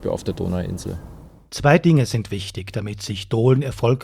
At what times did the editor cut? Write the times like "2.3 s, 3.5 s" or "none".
none